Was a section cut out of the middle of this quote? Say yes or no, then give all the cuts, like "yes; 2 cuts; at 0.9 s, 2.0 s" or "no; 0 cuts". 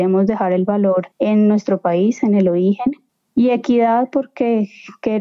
yes; 1 cut; at 1.1 s